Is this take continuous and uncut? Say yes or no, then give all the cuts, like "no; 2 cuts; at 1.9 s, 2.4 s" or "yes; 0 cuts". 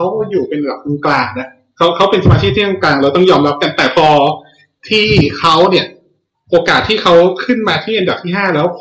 yes; 0 cuts